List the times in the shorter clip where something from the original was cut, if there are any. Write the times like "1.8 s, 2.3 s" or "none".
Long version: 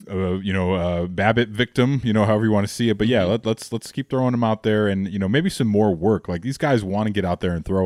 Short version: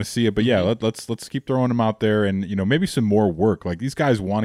none